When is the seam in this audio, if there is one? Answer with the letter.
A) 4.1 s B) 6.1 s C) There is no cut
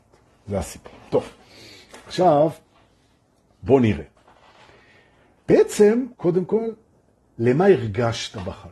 B